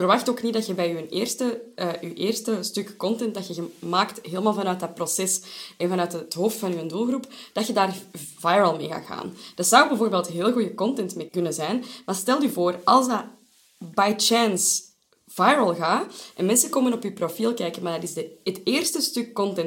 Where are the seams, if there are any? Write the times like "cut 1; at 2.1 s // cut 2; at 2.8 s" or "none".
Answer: cut 1; at 11.3 s